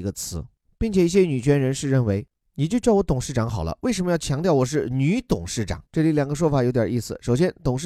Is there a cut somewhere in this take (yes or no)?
yes